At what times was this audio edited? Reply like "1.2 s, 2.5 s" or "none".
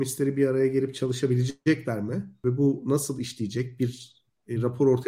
none